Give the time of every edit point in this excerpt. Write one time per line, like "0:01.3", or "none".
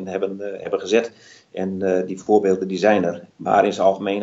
0:03.3